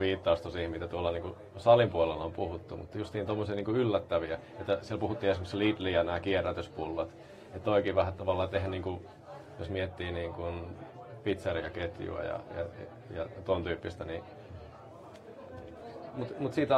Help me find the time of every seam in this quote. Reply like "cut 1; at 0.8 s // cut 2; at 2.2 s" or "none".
none

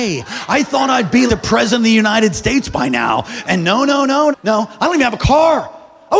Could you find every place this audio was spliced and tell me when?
cut 1; at 1.3 s // cut 2; at 4.3 s

